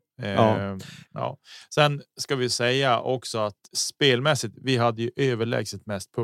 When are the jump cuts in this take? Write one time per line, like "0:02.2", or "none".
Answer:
0:01.1
0:03.7